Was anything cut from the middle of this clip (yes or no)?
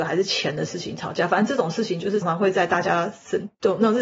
yes